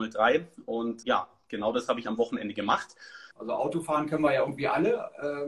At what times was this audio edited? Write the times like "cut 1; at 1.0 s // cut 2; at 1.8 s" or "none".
cut 1; at 1.0 s // cut 2; at 3.3 s